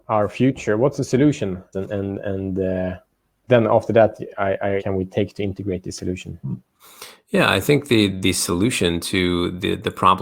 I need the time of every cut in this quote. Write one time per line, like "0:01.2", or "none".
0:01.7
0:04.8